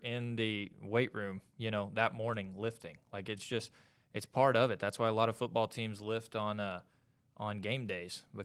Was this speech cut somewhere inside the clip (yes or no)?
no